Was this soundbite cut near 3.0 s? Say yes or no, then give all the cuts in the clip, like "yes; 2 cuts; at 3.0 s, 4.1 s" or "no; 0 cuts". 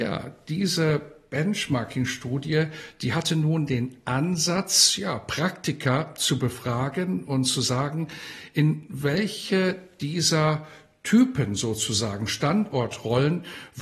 no; 0 cuts